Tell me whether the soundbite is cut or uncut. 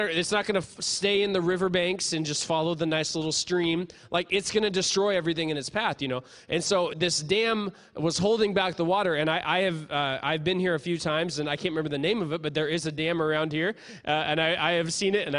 uncut